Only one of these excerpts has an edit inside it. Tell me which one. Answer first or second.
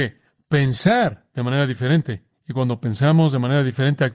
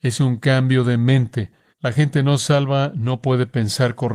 second